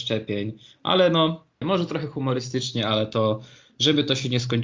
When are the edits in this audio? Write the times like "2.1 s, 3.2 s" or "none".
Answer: 1.6 s